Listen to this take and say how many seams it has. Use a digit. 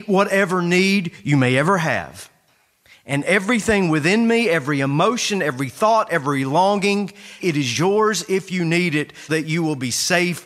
3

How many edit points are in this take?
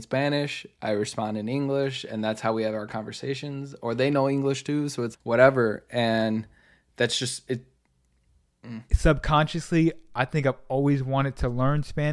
2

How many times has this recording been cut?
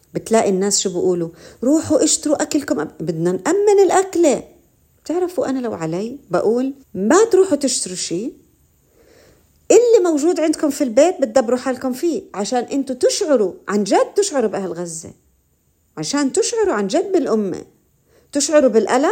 1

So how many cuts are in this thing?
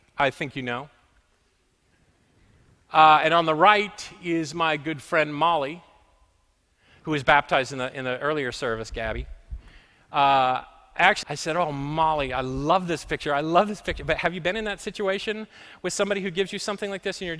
1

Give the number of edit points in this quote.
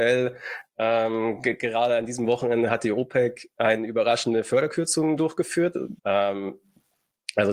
1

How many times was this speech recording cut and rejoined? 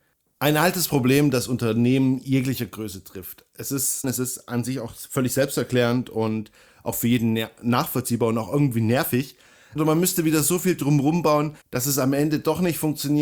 3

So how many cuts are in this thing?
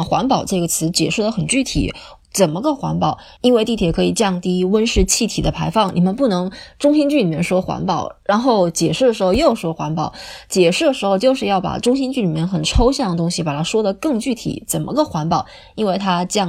0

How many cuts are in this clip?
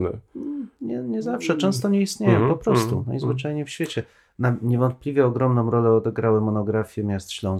0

